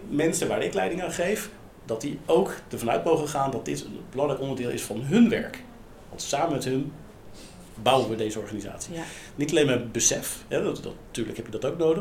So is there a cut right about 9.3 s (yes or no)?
yes